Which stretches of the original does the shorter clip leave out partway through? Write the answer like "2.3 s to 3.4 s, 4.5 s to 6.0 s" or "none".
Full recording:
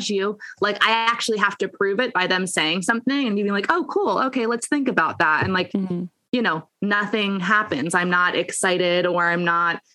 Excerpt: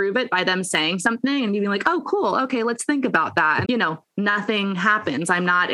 5.5 s to 6.3 s